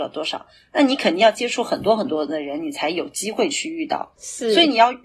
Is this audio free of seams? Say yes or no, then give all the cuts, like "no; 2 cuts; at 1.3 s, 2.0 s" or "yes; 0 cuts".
no; 1 cut; at 4.1 s